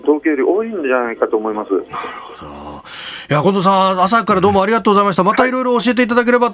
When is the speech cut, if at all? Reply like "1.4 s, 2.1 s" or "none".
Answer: none